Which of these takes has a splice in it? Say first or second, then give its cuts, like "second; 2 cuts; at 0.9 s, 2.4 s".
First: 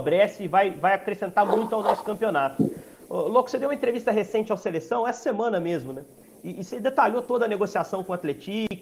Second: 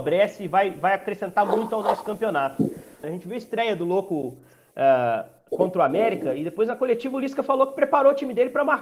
second; 1 cut; at 3.0 s